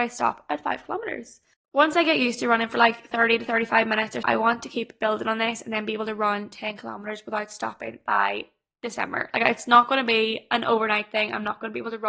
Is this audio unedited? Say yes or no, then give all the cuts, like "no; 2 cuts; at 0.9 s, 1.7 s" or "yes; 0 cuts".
no; 1 cut; at 4.2 s